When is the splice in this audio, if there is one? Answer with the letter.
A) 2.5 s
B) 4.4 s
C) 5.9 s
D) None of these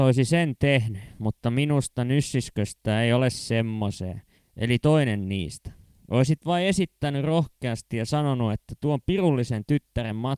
B